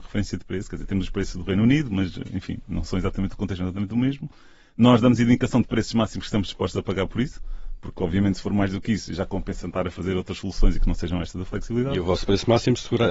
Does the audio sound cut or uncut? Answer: uncut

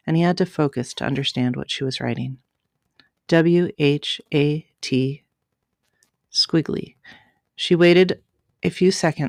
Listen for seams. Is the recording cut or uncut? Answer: uncut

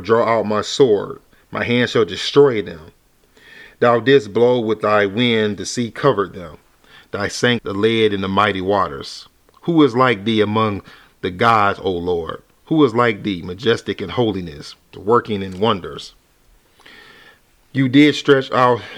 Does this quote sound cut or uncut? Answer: cut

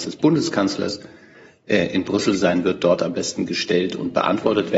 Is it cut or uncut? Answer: uncut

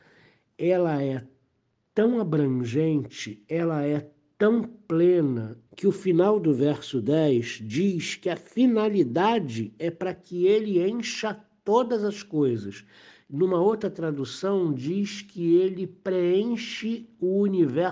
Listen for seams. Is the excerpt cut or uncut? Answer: cut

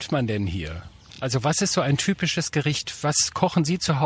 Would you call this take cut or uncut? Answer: uncut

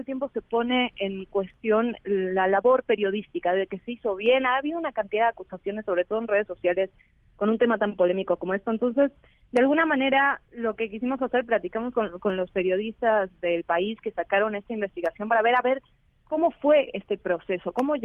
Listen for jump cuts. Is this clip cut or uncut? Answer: uncut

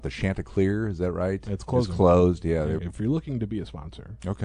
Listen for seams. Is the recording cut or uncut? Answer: cut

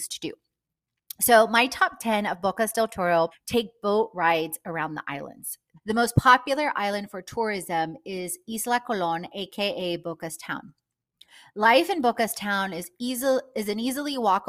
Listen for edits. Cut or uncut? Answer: cut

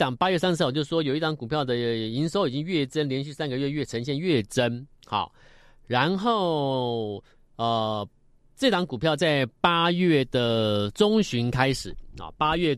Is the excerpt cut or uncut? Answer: uncut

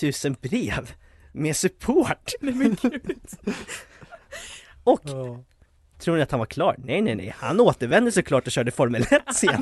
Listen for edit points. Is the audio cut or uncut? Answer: uncut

